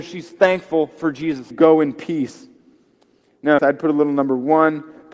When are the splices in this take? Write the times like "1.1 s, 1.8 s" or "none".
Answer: 1.5 s, 3.6 s